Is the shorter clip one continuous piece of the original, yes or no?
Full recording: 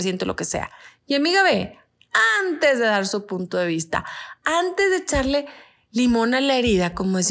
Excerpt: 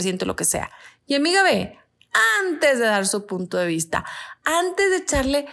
yes